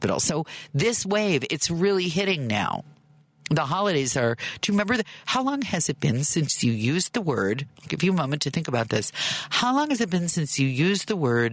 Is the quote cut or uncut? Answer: uncut